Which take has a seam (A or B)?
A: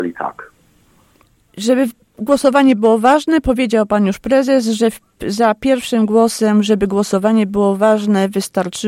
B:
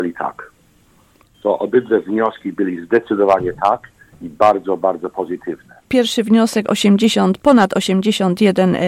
B